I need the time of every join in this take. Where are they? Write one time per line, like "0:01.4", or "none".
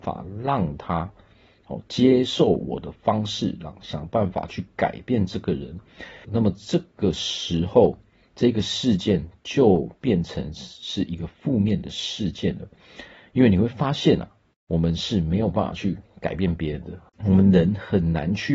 0:06.2
0:17.1